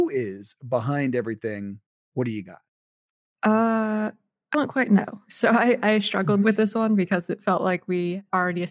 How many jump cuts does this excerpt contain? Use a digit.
1